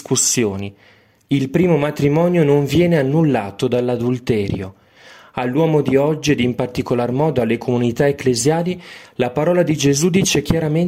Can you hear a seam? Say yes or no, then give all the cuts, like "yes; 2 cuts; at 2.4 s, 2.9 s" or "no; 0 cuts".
yes; 1 cut; at 1.2 s